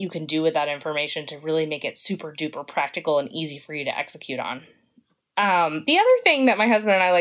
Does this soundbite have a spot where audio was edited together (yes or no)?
no